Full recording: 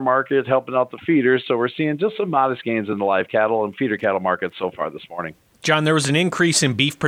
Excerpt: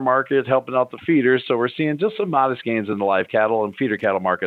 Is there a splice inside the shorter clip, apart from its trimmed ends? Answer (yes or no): no